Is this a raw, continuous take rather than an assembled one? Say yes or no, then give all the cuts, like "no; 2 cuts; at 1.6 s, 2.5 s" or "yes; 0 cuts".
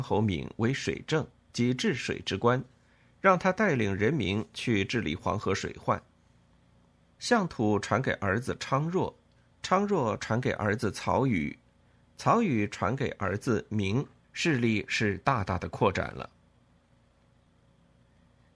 no; 2 cuts; at 7.0 s, 14.2 s